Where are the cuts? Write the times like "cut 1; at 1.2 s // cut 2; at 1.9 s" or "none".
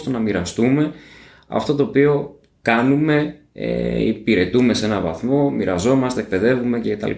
none